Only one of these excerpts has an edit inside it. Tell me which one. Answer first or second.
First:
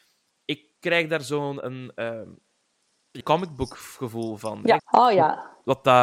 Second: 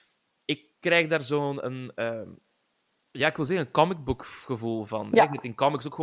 first